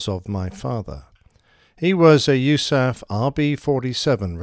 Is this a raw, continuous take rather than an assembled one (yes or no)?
yes